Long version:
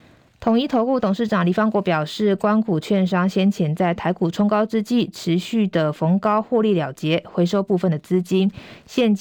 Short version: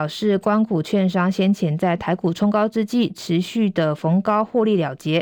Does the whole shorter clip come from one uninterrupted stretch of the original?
yes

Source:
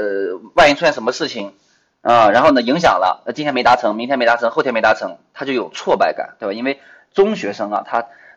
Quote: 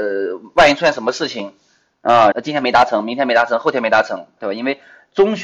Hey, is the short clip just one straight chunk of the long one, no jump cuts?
no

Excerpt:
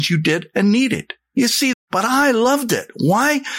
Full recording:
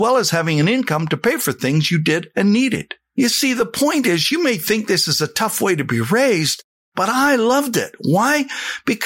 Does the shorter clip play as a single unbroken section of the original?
no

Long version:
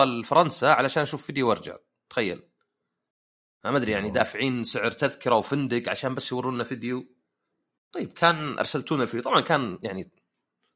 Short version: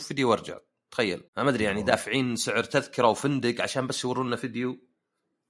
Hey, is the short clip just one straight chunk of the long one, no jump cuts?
no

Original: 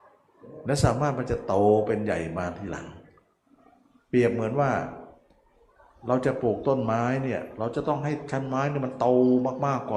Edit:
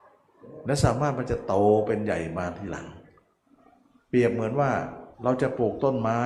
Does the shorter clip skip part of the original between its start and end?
yes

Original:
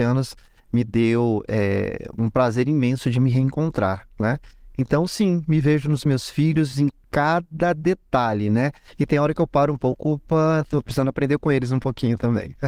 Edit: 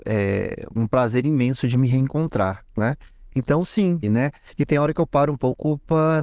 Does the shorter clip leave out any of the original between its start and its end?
yes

